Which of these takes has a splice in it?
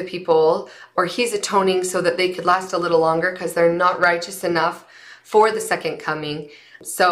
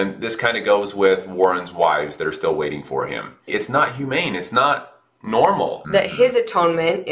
second; 2 cuts; at 3.5 s, 5.8 s

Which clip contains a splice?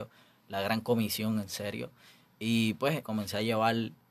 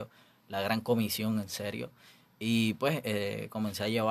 first; 1 cut; at 3.0 s

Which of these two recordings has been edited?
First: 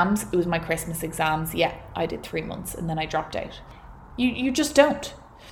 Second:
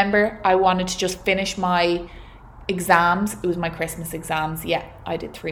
first; 1 cut; at 4.1 s

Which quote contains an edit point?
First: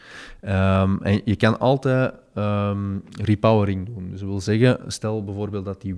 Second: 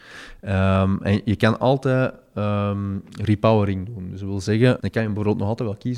second; 1 cut; at 4.8 s

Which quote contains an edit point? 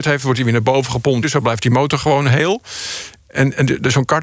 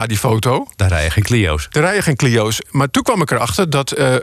first; 1 cut; at 1.2 s

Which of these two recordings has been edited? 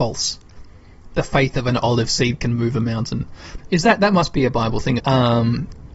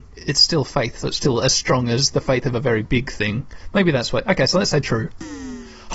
first; 2 cuts; at 3.6 s, 5.0 s

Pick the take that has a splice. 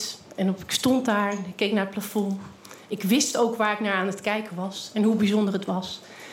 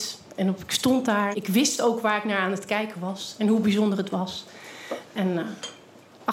second; 2 cuts; at 1.3 s, 5.1 s

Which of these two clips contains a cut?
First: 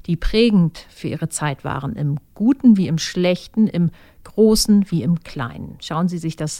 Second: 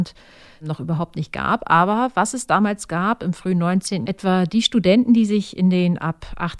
second; 1 cut; at 4.0 s

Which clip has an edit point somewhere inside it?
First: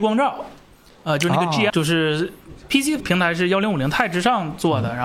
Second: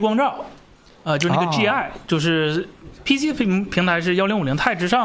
first; 2 cuts; at 1.7 s, 3.0 s

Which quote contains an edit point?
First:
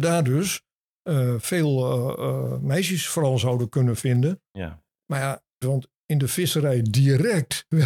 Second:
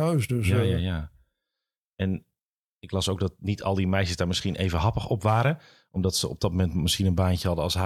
first; 1 cut; at 5.6 s

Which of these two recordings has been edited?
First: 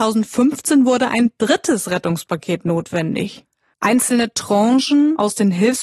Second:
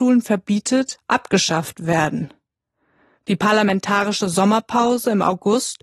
first; 1 cut; at 3.7 s

